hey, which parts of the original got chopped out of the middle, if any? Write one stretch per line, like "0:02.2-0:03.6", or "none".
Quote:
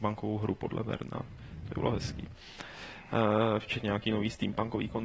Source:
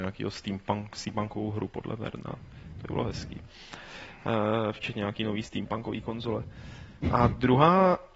none